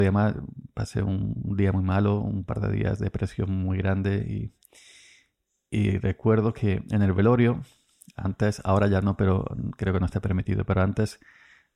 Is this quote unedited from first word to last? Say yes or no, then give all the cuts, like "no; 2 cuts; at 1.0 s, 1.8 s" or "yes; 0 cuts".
yes; 0 cuts